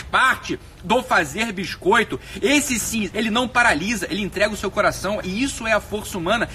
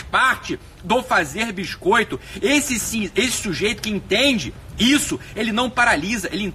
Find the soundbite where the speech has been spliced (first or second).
first